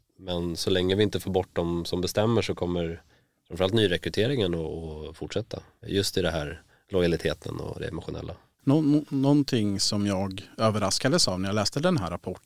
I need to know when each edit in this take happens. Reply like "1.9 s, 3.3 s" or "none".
none